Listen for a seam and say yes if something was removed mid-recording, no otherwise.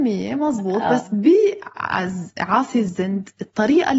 no